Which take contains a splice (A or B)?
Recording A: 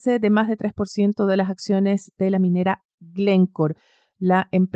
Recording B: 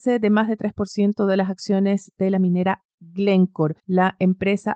B